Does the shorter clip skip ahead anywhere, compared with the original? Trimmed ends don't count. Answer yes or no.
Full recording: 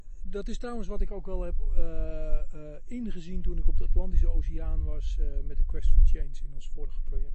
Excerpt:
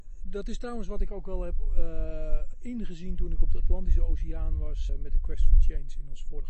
yes